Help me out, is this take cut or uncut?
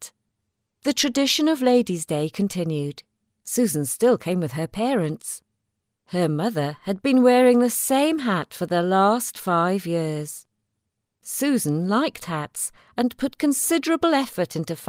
uncut